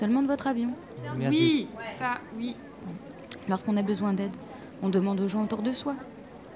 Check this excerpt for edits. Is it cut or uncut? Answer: uncut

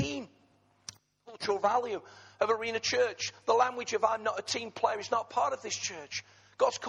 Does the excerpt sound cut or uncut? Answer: uncut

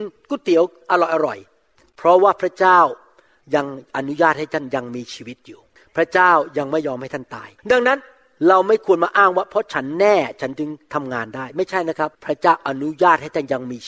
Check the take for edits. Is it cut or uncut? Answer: cut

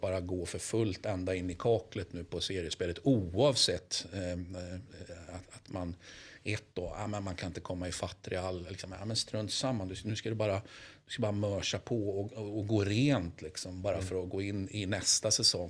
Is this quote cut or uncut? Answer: uncut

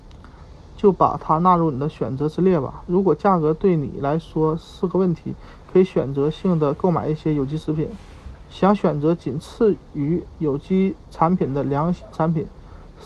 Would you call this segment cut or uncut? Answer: uncut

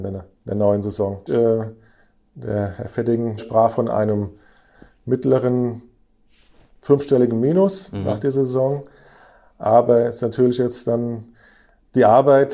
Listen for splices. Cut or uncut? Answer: cut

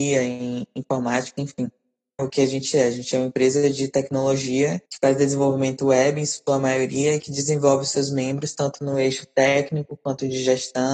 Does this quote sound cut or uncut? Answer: cut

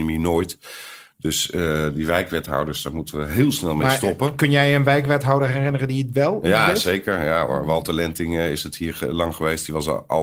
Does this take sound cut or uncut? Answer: uncut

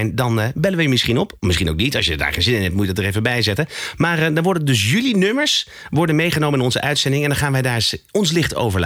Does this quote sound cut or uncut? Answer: uncut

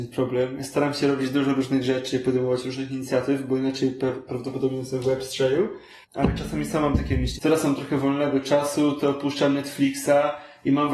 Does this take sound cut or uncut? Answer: cut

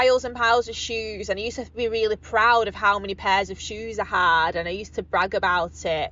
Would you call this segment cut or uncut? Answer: uncut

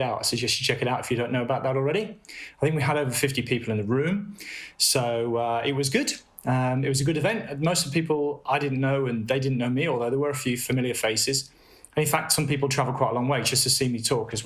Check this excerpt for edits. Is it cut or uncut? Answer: uncut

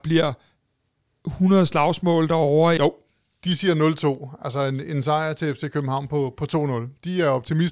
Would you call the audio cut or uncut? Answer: cut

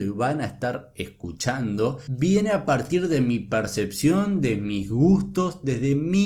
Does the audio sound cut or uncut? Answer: uncut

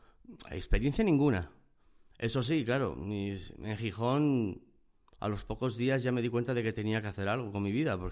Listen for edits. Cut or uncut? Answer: uncut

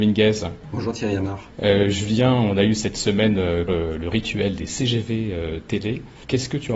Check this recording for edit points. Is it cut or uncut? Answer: cut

